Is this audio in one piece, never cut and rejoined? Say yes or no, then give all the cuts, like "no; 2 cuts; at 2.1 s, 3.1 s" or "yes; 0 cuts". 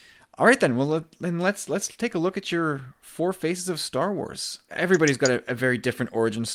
no; 1 cut; at 4.7 s